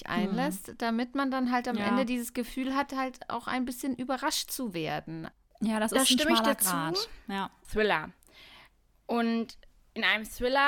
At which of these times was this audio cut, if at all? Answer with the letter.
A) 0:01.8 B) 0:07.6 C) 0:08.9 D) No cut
B